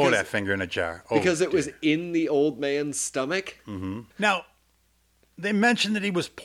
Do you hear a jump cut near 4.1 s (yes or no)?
yes